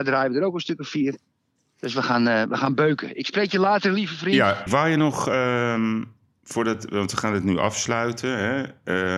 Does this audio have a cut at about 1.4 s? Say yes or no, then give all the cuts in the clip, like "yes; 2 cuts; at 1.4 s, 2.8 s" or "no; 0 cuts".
no; 1 cut; at 4.7 s